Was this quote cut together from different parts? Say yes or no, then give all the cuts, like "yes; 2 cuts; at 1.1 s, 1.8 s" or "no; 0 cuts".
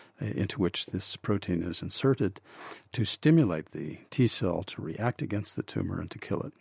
no; 0 cuts